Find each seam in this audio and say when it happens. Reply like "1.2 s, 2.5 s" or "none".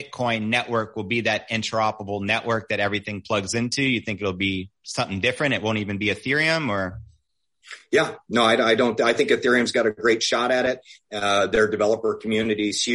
none